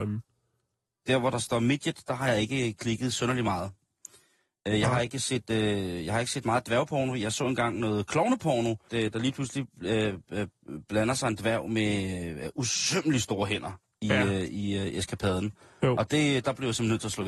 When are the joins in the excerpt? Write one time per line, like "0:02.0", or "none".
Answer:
0:08.9